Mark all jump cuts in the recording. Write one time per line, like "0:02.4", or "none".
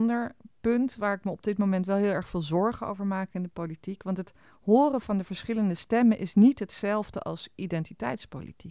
none